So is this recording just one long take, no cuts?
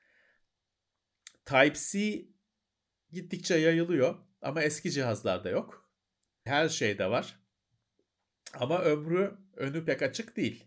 no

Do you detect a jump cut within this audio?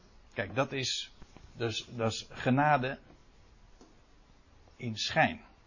no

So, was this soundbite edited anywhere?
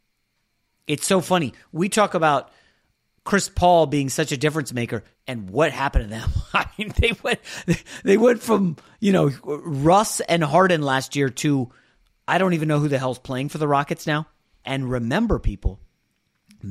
yes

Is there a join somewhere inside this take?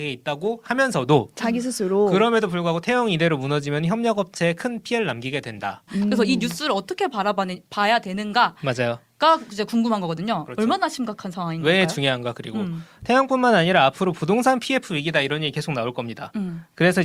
yes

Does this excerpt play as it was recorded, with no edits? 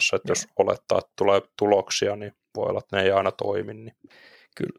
yes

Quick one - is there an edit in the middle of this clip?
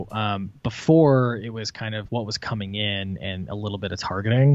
yes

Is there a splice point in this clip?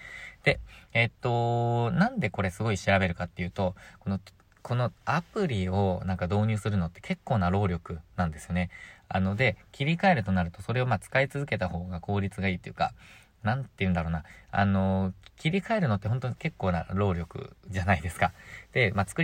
no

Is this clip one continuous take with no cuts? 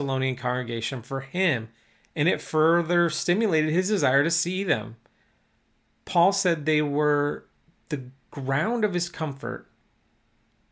yes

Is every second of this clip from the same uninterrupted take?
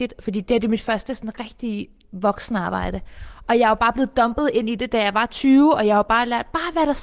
yes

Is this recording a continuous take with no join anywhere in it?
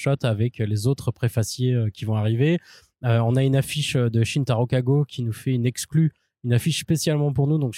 yes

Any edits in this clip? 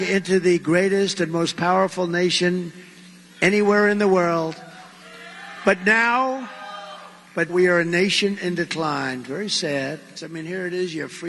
yes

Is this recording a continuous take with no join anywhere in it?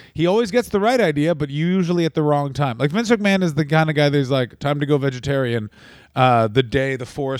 yes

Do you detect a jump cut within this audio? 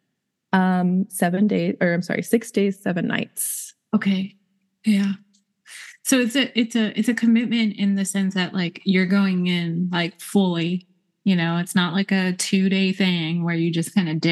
no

